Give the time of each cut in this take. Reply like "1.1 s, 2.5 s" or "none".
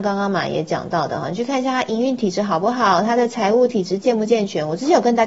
none